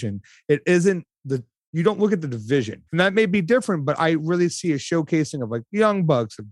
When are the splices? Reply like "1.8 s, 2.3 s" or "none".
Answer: 2.9 s

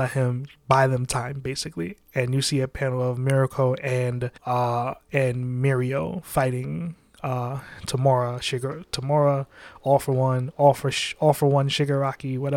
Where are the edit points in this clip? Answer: 4.4 s

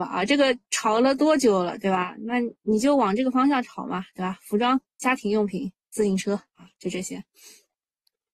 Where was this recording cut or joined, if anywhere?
none

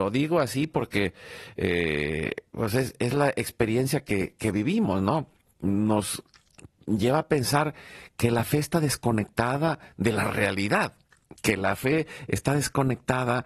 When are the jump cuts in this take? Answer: none

